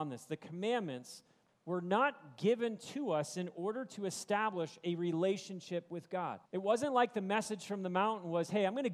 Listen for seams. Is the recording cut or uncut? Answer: cut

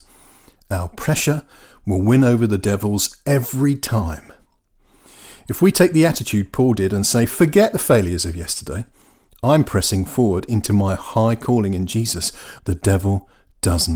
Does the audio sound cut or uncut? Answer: cut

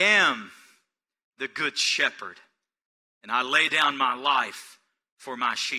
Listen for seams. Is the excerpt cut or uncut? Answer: uncut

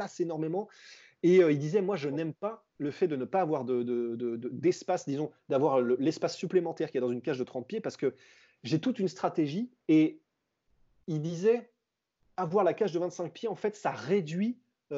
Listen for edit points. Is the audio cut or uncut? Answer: cut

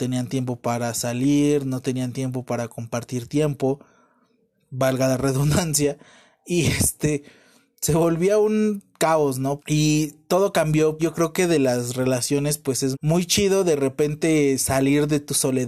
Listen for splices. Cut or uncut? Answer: cut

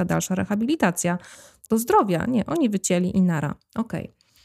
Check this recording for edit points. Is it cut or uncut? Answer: cut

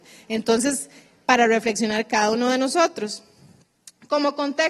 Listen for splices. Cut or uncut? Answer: uncut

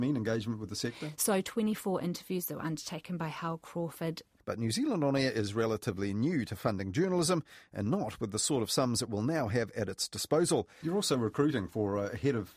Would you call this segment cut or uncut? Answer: cut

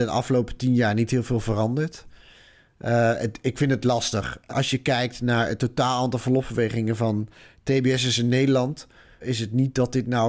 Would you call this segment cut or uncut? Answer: cut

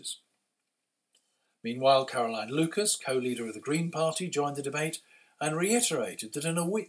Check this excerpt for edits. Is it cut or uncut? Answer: uncut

